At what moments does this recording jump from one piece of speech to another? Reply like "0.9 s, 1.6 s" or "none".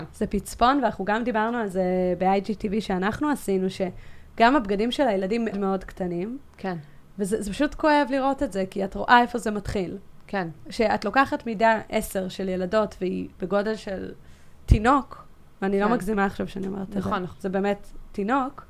5.5 s, 17.3 s